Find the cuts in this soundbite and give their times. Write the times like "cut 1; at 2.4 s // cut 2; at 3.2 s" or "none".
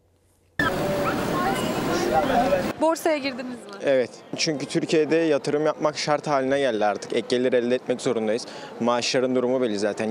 none